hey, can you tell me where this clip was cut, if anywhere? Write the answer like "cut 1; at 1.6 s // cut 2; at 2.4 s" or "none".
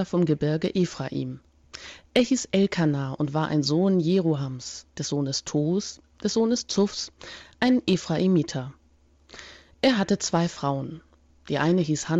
cut 1; at 4.9 s

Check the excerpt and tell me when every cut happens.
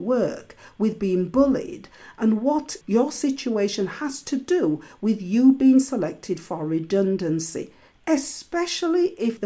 cut 1; at 2.8 s

